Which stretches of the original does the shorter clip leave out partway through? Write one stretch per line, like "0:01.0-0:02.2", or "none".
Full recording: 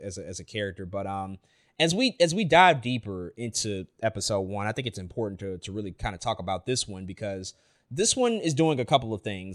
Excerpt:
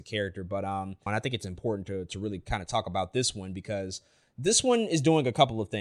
0:01.5-0:04.6